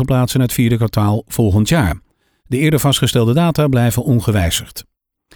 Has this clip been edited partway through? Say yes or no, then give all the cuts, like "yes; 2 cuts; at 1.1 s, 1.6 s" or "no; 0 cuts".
yes; 1 cut; at 2.4 s